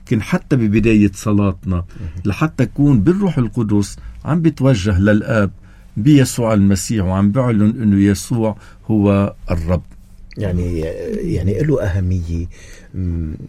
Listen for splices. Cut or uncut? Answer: uncut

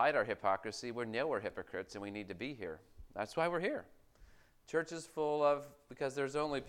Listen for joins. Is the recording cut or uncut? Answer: uncut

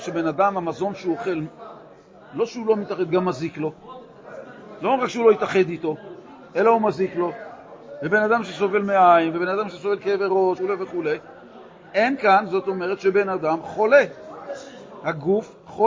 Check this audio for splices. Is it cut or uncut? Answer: cut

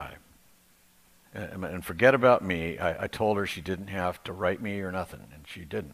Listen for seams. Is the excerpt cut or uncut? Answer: cut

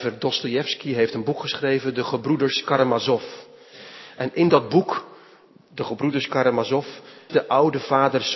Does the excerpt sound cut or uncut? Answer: cut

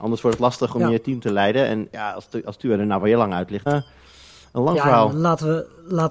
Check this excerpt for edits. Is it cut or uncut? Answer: cut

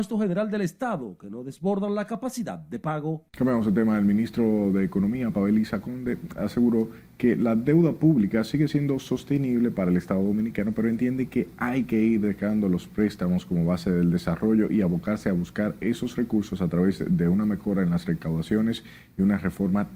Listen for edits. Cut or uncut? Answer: cut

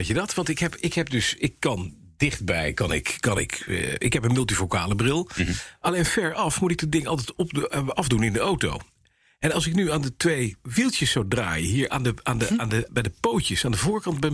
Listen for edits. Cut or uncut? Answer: cut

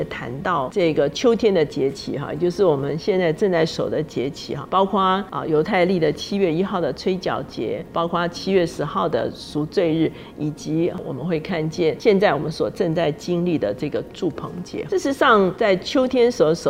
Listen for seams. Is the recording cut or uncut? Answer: uncut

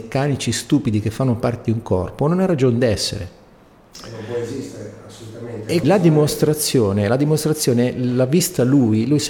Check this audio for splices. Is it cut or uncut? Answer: cut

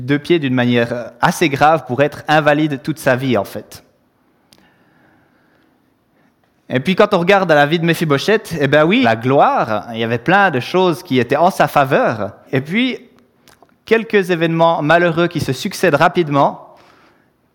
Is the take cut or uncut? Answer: cut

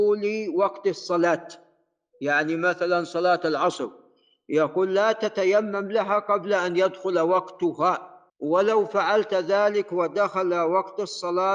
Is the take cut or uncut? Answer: cut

